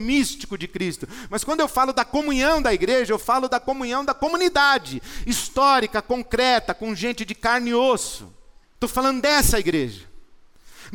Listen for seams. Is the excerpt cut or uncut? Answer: cut